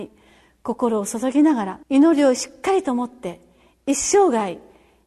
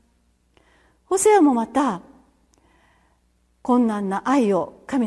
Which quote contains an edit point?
first; 1 cut; at 1.8 s

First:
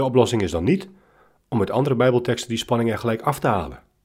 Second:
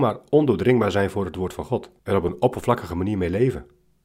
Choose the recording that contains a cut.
second; 1 cut; at 2.0 s

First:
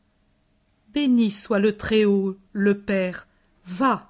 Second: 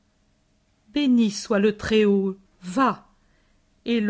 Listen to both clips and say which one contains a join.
second; 1 cut; at 2.5 s

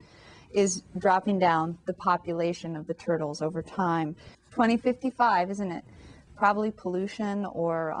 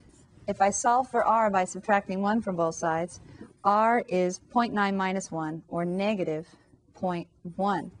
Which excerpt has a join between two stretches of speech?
first; 2 cuts; at 4.3 s, 6.3 s

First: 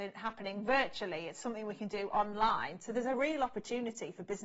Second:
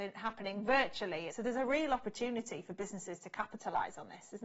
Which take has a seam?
second; 1 cut; at 1.3 s

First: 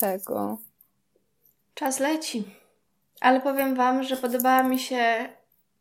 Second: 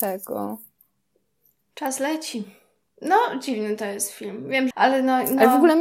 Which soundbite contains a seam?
second; 2 cuts; at 2.9 s, 4.7 s

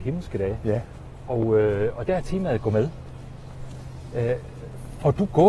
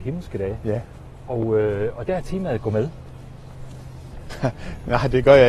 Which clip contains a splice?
second; 1 cut; at 4.1 s

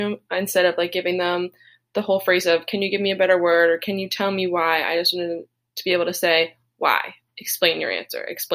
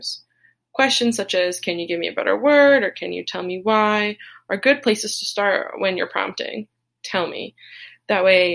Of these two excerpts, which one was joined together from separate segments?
second; 1 cut; at 7.0 s

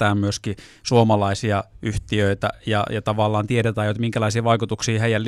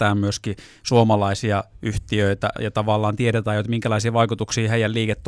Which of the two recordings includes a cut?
second; 1 cut; at 2.6 s

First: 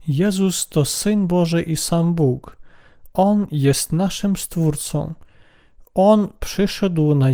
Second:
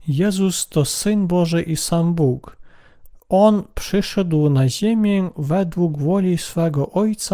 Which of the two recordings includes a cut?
second; 1 cut; at 3.1 s

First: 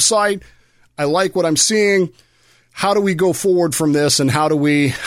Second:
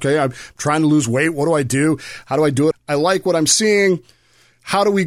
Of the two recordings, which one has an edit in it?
second; 1 cut; at 2.7 s

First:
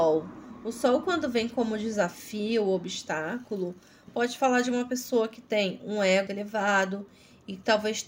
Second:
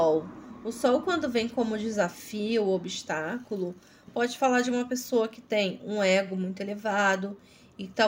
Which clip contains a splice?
first; 1 cut; at 6.3 s

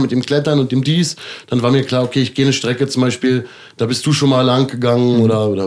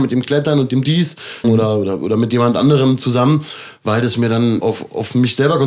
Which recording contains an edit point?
second; 2 cuts; at 1.4 s, 4.6 s

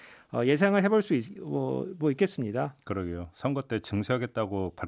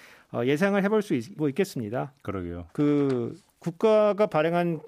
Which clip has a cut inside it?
second; 2 cuts; at 1.4 s, 2.7 s

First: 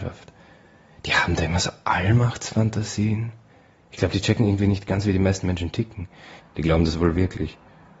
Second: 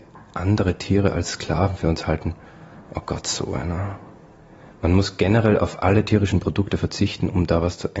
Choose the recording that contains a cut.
first; 1 cut; at 6.4 s

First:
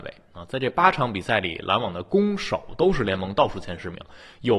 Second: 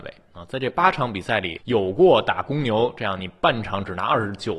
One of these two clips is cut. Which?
second; 1 cut; at 1.6 s

